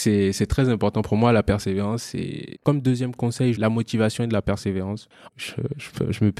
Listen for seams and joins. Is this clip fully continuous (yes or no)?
no